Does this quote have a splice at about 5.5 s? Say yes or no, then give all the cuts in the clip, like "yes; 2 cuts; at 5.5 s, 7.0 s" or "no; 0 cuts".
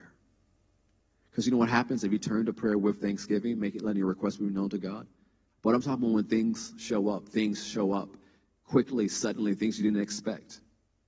yes; 1 cut; at 5.5 s